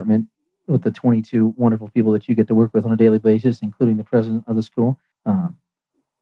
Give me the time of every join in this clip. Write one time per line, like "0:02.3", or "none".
0:05.1